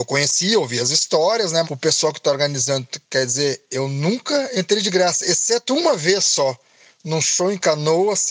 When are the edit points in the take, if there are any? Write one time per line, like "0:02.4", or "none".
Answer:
0:01.6